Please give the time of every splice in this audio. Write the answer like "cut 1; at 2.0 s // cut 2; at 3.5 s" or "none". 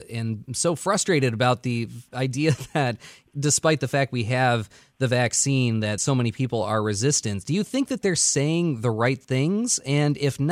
none